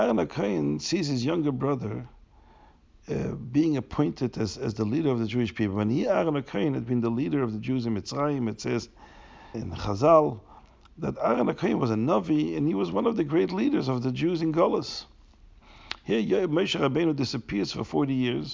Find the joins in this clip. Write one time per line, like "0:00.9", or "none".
0:09.5